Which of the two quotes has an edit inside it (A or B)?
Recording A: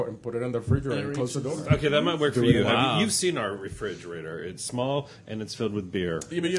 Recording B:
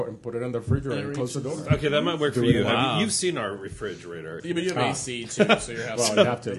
B